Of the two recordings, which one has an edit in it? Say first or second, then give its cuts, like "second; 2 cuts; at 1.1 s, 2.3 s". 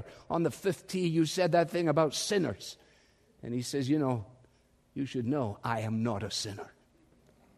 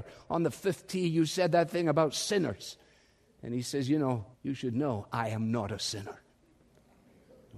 second; 1 cut; at 4.3 s